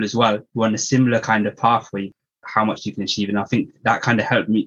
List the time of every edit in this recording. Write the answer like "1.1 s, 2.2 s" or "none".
2.4 s